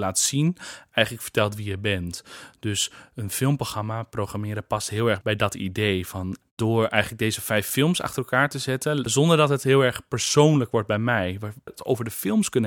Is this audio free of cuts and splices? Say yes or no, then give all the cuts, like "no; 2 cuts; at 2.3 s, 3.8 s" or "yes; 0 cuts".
no; 2 cuts; at 9.1 s, 11.7 s